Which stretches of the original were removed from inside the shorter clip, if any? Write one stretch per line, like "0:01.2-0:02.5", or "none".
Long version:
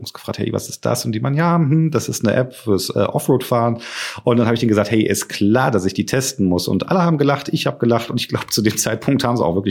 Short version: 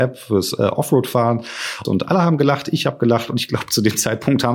0:04.2-0:06.7